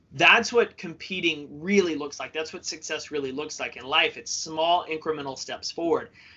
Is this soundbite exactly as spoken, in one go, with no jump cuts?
yes; 0 cuts

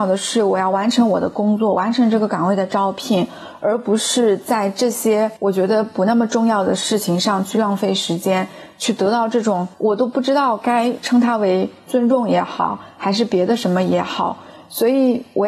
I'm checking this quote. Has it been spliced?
no; 0 cuts

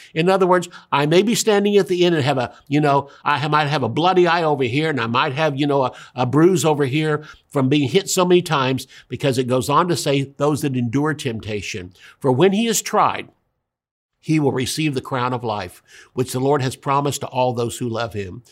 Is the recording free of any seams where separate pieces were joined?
yes; 0 cuts

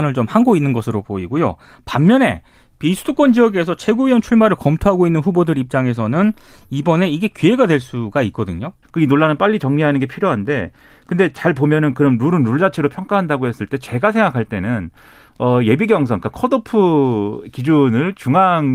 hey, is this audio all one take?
no; 1 cut; at 8.8 s

